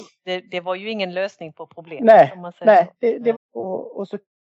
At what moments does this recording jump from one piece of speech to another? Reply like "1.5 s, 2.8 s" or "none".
3.3 s